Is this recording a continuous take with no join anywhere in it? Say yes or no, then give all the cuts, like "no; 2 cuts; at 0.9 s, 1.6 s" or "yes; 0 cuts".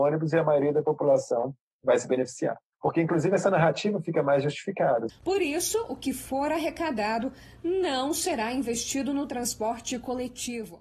no; 2 cuts; at 2.7 s, 5.1 s